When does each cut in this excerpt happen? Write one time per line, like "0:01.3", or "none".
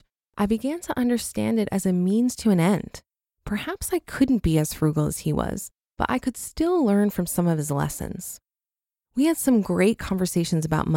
none